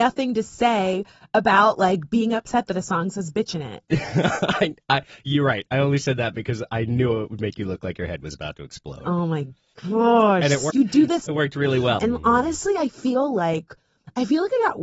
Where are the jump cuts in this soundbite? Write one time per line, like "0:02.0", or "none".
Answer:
0:10.7
0:12.0